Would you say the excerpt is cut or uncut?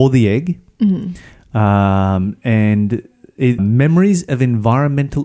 cut